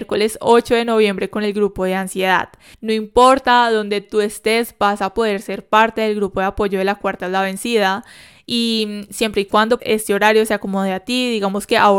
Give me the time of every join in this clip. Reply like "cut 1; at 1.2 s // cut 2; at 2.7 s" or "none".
cut 1; at 2.7 s // cut 2; at 9.8 s